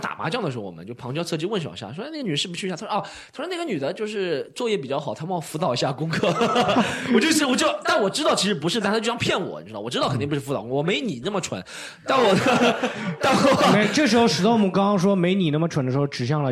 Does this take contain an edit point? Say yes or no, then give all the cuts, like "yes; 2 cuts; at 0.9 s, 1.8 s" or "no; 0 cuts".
no; 0 cuts